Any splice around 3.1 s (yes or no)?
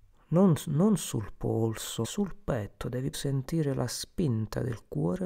yes